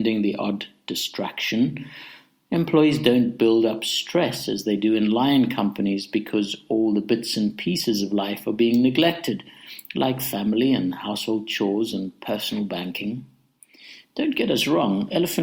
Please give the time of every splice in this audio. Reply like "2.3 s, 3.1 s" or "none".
none